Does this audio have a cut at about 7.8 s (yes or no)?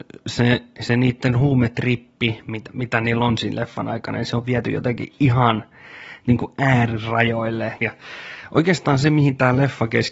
yes